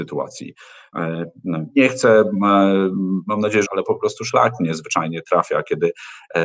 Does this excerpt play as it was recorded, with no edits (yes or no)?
no